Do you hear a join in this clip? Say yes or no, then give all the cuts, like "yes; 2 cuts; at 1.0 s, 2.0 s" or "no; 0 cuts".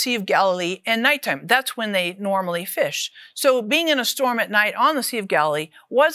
no; 0 cuts